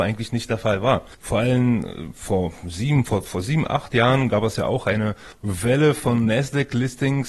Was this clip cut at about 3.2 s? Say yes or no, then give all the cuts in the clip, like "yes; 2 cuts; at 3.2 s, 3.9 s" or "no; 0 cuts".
yes; 1 cut; at 3.2 s